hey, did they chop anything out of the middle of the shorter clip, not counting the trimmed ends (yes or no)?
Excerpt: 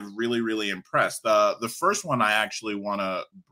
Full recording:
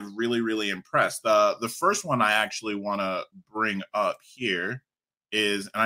no